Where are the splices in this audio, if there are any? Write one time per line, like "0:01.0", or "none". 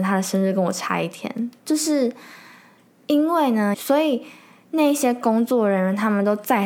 0:01.6
0:03.7